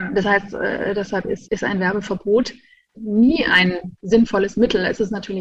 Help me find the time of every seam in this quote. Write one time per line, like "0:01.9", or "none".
0:01.4
0:02.9